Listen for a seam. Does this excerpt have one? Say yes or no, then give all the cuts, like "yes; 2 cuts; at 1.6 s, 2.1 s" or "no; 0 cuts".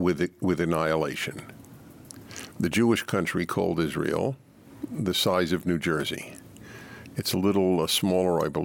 no; 0 cuts